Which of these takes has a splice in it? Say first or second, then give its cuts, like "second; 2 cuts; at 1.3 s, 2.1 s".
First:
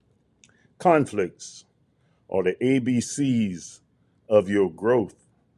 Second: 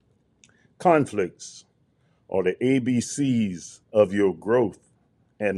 second; 1 cut; at 3.8 s